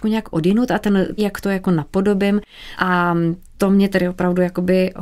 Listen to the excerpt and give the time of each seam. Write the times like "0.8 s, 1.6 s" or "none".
1.2 s, 2.7 s